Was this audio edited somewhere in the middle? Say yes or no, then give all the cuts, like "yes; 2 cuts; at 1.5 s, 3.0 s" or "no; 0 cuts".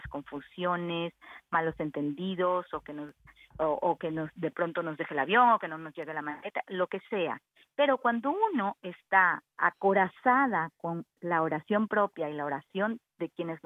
no; 0 cuts